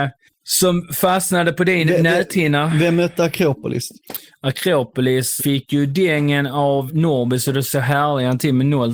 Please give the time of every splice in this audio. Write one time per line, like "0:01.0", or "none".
0:05.4
0:06.9

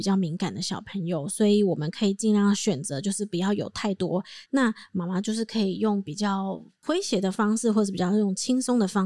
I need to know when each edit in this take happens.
0:04.5

